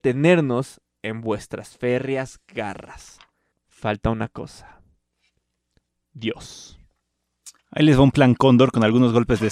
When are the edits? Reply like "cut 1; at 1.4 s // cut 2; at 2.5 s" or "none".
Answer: cut 1; at 3.5 s // cut 2; at 7.6 s